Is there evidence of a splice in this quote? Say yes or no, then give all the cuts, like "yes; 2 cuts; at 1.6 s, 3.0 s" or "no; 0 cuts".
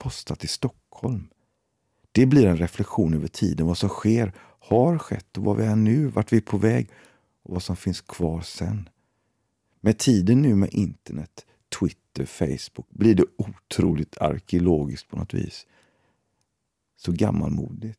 no; 0 cuts